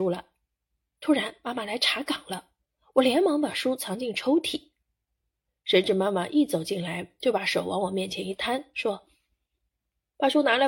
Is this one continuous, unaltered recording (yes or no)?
yes